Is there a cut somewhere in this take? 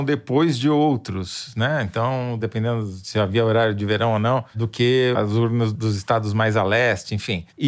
yes; 1 cut; at 2.4 s

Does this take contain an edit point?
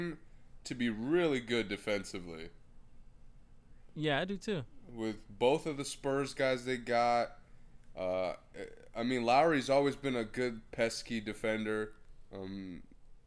yes; 1 cut; at 12.3 s

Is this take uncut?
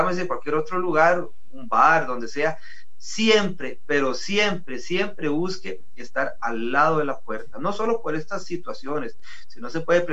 yes; 0 cuts

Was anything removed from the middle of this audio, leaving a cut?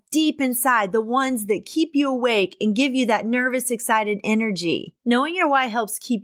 yes; 1 cut; at 5.0 s

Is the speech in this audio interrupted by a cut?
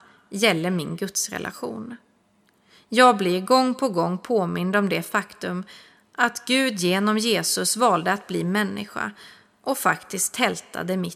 no; 0 cuts

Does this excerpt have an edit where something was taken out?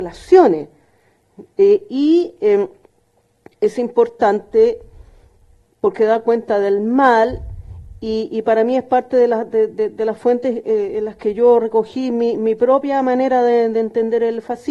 no; 0 cuts

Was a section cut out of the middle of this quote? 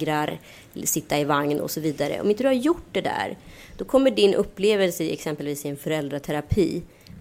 no; 0 cuts

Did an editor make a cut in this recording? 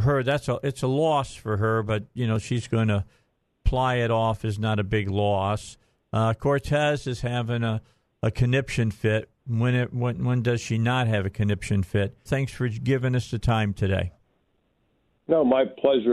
yes; 1 cut; at 12.3 s

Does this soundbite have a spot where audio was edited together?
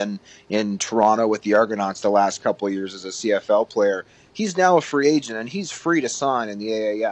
no; 0 cuts

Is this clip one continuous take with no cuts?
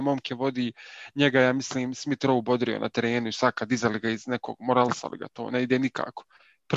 yes; 0 cuts

